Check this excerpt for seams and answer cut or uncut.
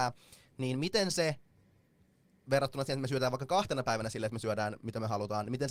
uncut